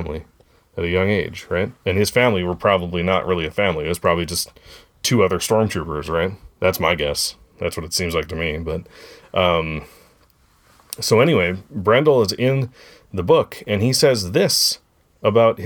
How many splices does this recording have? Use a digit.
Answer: 1